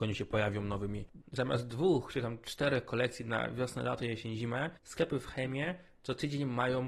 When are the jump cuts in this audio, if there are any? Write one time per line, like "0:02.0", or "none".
0:01.2
0:04.8